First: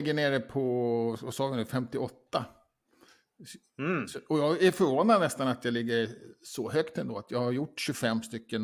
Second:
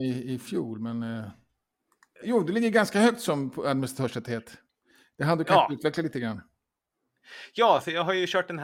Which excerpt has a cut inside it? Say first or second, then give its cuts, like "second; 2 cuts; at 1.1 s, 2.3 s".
second; 1 cut; at 2.2 s